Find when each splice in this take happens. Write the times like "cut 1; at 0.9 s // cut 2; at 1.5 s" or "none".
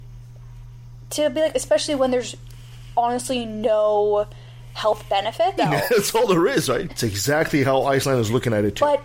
cut 1; at 1.5 s // cut 2; at 5.6 s // cut 3; at 6.9 s